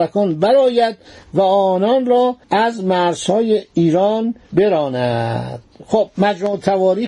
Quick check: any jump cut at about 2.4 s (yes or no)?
yes